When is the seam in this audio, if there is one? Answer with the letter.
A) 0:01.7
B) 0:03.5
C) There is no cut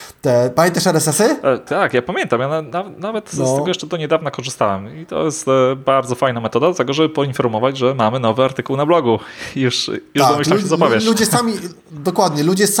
A